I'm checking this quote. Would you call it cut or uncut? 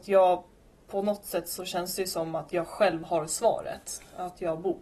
uncut